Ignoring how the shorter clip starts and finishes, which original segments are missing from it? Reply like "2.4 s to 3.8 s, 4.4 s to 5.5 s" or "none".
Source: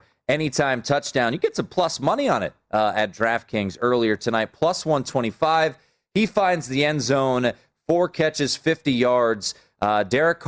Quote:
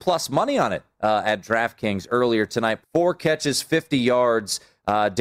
4.5 s to 7.8 s